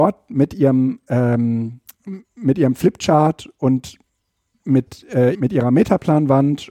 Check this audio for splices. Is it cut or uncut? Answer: cut